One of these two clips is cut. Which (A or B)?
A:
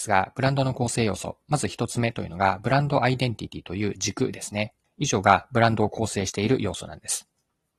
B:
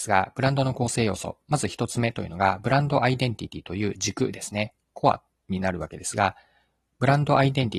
A